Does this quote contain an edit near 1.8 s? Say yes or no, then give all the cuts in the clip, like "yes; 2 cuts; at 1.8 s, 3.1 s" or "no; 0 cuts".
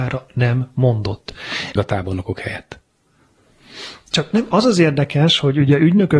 yes; 1 cut; at 1.8 s